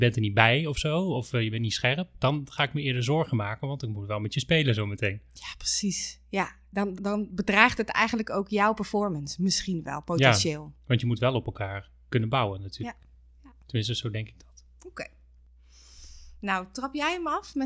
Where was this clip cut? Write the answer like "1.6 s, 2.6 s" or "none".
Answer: 6.9 s